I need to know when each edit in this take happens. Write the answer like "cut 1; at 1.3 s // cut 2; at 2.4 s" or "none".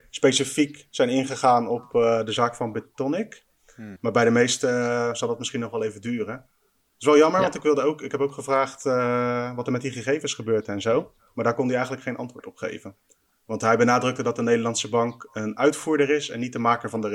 cut 1; at 4.0 s